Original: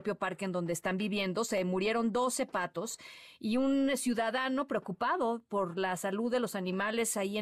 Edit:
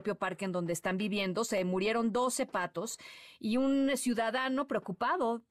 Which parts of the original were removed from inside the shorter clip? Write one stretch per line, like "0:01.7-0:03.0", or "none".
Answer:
none